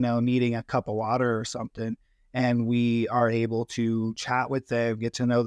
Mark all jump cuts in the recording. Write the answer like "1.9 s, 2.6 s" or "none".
none